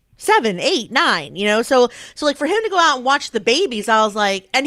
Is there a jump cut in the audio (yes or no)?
no